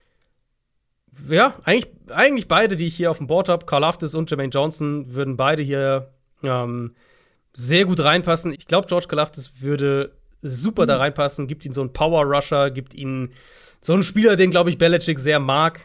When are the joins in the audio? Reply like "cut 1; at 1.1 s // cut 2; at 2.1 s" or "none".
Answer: cut 1; at 8.5 s